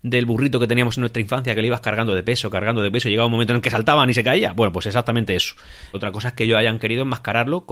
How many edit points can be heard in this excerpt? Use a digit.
1